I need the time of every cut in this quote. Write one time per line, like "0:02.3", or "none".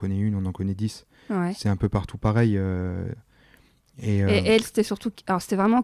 none